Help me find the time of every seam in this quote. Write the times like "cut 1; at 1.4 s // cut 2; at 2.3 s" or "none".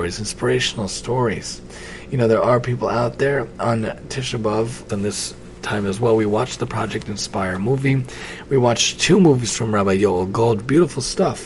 cut 1; at 4.9 s